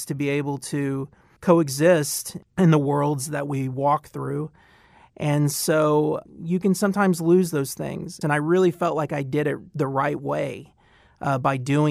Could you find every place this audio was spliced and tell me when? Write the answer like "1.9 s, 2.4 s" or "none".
8.2 s

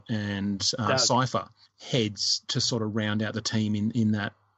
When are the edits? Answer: none

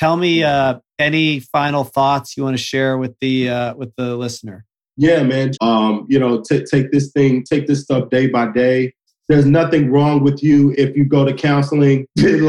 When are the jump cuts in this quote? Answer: 5.5 s, 9.1 s, 10.7 s

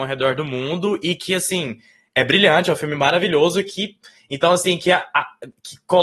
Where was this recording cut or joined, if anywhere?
none

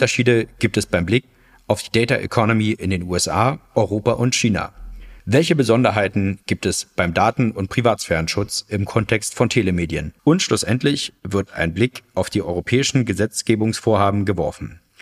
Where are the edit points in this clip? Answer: 5.2 s, 10.2 s

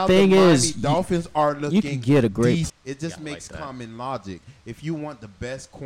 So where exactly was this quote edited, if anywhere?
2.7 s

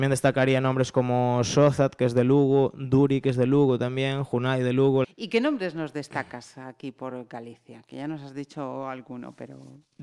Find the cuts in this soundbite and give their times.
5.0 s

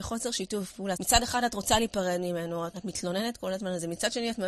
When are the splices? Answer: 0.9 s, 2.7 s

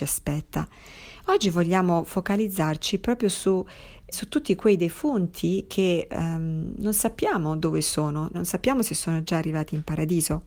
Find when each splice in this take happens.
4.1 s, 8.3 s

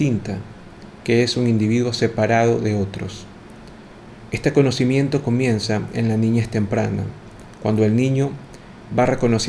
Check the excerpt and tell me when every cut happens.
none

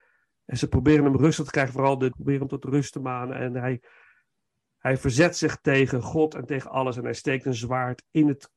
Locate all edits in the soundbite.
2.1 s

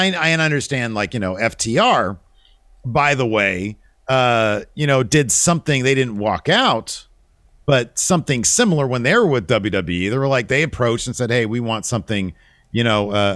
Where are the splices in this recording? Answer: none

